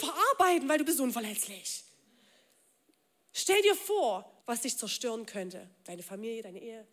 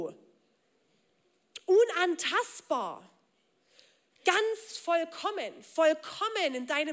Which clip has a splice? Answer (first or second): first